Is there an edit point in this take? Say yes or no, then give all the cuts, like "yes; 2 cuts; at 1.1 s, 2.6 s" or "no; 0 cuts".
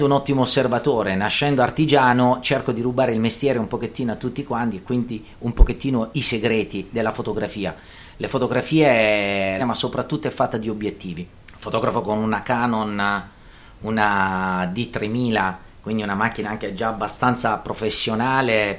yes; 2 cuts; at 9.6 s, 11.4 s